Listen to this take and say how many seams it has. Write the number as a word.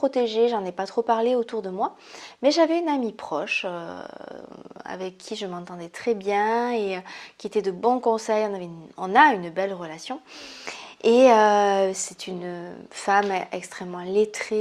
zero